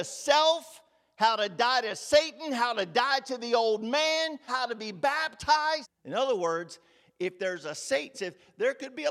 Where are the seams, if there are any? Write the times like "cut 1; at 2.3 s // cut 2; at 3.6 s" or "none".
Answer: cut 1; at 4.5 s // cut 2; at 5.8 s // cut 3; at 8.1 s